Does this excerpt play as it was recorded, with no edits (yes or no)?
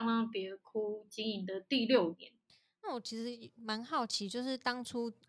yes